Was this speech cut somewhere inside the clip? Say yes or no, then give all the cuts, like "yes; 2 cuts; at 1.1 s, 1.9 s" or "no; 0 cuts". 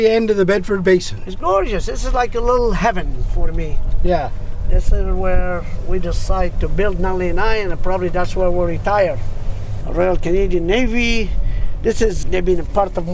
yes; 2 cuts; at 9.8 s, 12.2 s